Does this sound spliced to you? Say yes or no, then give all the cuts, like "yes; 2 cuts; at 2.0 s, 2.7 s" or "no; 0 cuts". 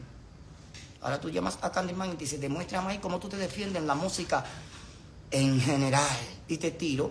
yes; 1 cut; at 1.0 s